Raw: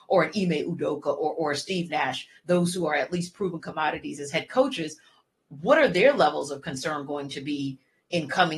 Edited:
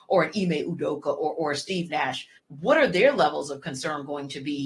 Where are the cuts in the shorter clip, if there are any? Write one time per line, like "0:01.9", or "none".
0:02.4